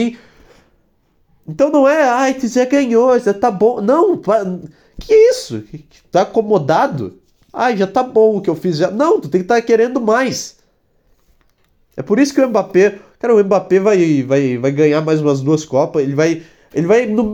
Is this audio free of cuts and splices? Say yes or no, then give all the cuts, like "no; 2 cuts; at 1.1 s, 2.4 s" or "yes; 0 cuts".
yes; 0 cuts